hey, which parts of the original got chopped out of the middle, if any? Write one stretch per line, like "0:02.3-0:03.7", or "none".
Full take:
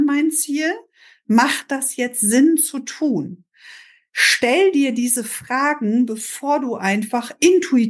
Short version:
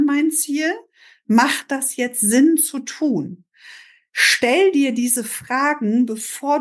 none